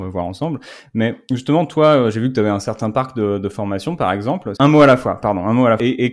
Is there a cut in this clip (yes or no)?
yes